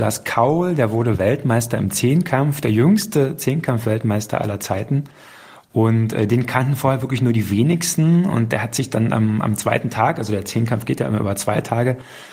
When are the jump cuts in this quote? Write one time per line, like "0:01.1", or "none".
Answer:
none